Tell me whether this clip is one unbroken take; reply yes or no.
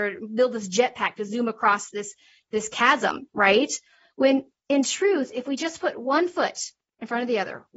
yes